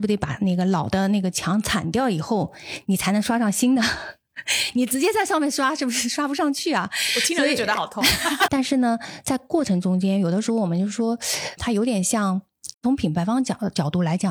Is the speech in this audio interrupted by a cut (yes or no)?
yes